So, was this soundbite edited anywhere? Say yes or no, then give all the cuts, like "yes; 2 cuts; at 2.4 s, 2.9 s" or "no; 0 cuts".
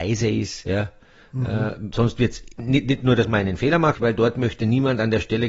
yes; 2 cuts; at 1.9 s, 3.9 s